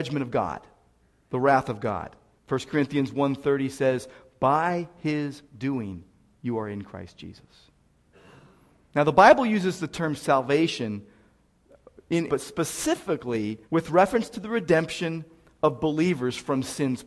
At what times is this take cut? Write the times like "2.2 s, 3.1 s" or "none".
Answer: 2.4 s, 12.3 s, 13.6 s